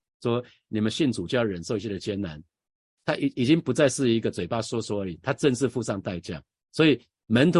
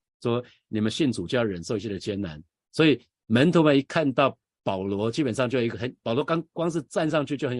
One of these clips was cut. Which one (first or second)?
second